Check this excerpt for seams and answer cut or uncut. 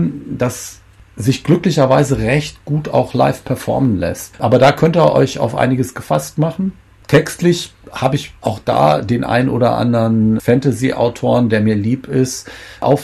cut